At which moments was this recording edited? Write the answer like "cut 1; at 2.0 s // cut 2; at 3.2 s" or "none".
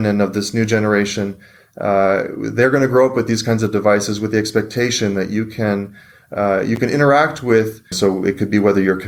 cut 1; at 7.9 s